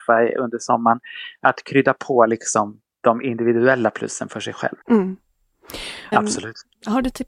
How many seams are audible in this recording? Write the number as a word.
two